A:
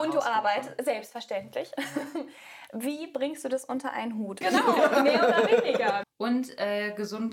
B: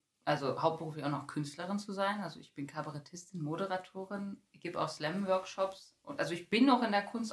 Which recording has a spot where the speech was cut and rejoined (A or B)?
A